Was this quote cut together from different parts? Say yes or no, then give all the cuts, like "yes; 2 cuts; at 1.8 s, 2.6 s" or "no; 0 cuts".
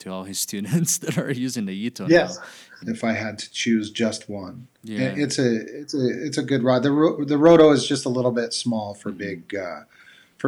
yes; 1 cut; at 2.8 s